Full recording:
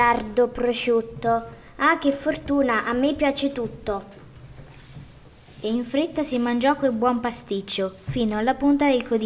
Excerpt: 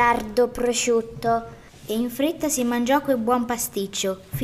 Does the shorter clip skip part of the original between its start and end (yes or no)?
yes